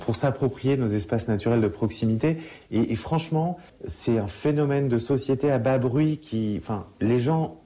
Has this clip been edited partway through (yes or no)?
yes